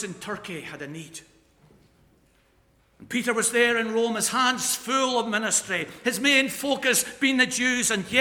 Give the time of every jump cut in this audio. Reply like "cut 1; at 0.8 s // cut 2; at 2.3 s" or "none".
none